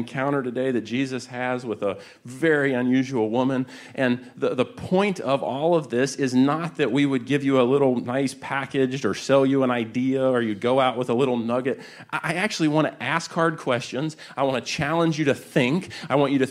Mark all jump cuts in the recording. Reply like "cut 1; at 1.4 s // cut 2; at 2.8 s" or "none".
none